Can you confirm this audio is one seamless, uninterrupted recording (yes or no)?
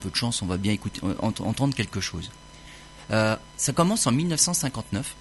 yes